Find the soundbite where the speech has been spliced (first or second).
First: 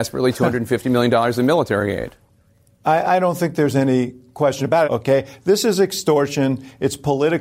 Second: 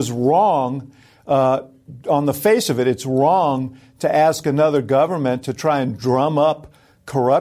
first